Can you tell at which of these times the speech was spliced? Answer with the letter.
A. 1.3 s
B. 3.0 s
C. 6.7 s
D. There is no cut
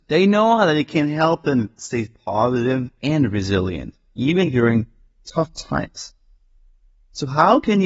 B